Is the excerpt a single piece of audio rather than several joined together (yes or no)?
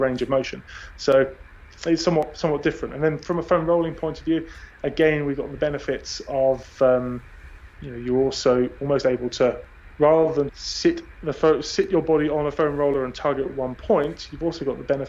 no